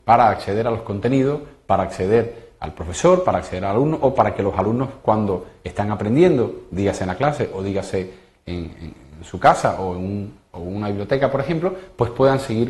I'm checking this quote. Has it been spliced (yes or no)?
no